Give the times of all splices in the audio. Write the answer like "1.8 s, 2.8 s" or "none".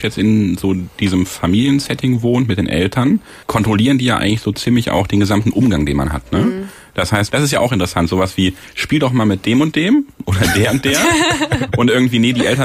3.4 s, 7.3 s

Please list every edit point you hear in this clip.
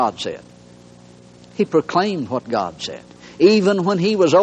none

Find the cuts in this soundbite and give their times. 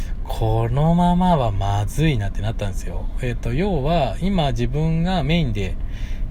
none

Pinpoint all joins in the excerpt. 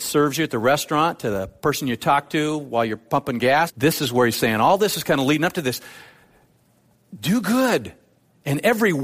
3.7 s

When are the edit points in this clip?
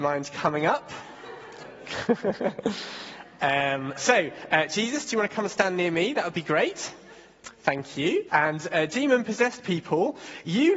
8.3 s

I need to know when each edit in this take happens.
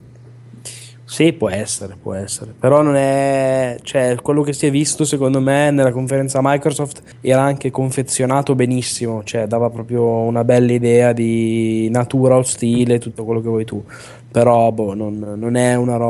7.1 s

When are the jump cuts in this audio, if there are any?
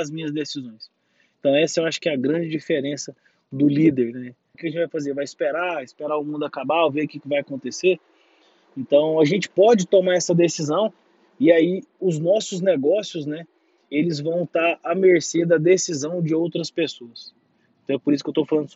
4.5 s

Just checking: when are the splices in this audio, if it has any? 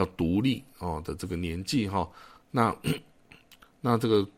none

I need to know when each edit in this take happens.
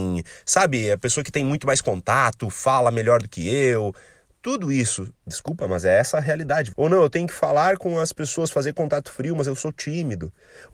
5.2 s, 6.7 s

